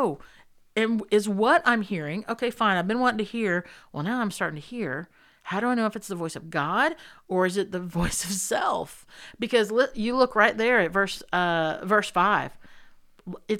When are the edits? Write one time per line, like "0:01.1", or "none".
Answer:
none